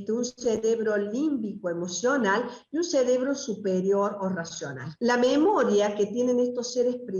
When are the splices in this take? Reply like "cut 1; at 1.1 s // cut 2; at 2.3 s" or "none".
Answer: cut 1; at 5.0 s

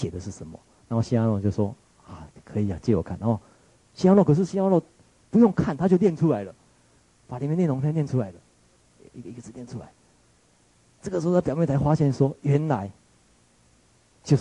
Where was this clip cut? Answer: none

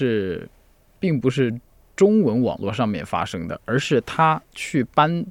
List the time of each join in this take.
none

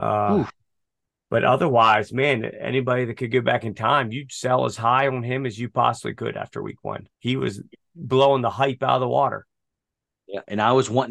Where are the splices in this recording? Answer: cut 1; at 1.2 s // cut 2; at 7.1 s

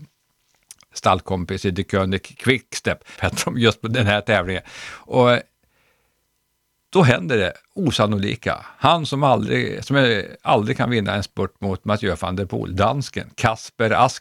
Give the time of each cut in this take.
cut 1; at 3.2 s

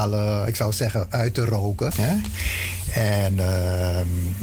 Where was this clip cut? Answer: cut 1; at 1.9 s

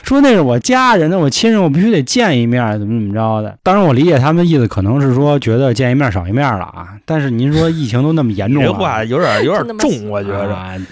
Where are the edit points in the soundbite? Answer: cut 1; at 3.6 s

